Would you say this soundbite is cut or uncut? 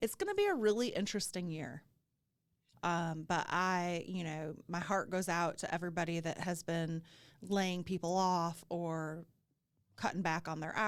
cut